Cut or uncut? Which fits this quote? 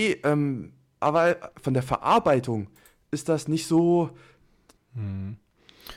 cut